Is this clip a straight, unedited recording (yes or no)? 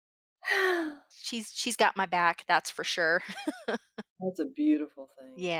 yes